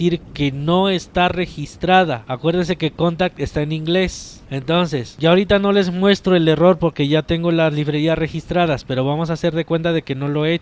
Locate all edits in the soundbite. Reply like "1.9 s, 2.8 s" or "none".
none